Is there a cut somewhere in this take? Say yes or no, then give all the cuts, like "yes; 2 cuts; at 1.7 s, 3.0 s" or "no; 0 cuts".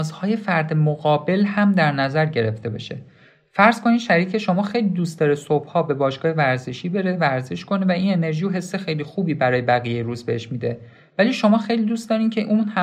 no; 0 cuts